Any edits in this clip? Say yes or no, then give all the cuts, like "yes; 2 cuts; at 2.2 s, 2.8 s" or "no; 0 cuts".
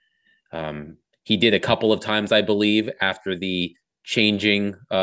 no; 0 cuts